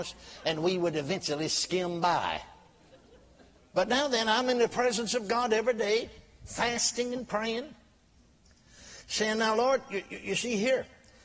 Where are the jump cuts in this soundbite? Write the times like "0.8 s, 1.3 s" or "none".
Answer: none